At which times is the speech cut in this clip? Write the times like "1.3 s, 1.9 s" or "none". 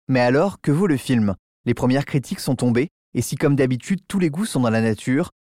none